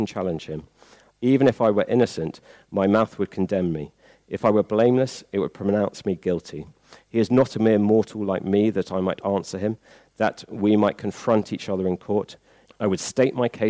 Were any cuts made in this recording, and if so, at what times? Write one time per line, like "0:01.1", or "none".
0:12.7